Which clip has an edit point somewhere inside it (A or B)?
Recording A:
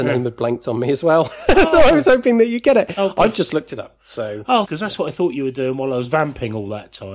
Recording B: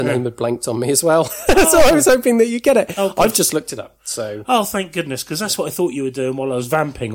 A